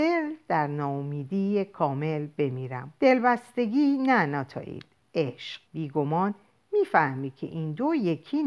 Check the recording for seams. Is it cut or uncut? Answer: cut